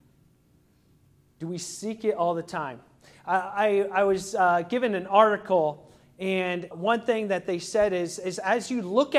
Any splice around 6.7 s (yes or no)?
yes